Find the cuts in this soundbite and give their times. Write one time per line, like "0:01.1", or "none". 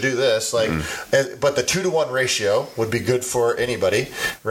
none